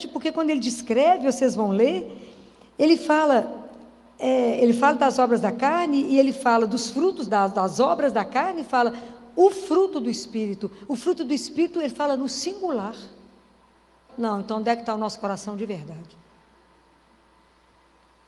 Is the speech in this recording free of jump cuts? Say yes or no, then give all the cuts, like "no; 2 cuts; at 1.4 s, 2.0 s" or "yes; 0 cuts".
no; 2 cuts; at 7.3 s, 14.1 s